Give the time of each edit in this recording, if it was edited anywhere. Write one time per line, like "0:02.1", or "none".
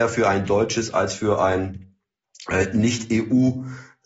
none